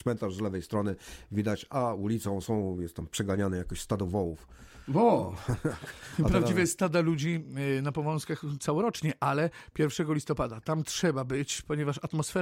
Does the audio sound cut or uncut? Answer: uncut